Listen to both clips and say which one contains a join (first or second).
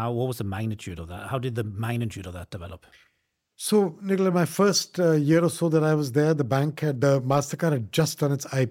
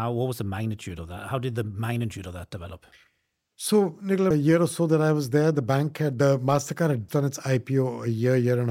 second